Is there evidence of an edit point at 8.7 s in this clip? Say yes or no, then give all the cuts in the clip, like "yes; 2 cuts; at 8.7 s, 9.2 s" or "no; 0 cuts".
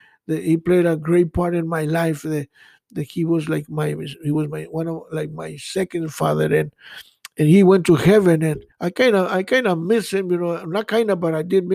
yes; 1 cut; at 8.7 s